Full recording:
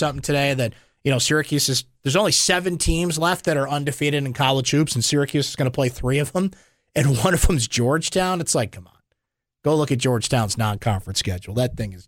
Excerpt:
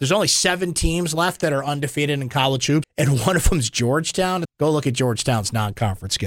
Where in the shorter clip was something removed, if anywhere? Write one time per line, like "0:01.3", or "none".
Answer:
0:02.8
0:04.4